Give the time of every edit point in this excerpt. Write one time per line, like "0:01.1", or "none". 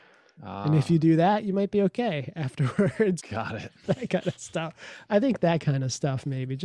0:03.2